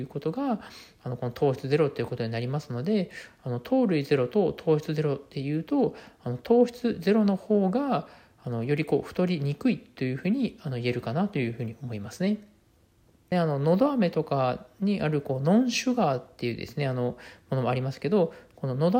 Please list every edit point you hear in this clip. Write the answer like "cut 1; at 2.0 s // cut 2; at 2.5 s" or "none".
cut 1; at 13.3 s